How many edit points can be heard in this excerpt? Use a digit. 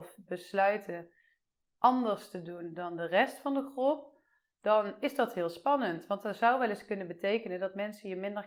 0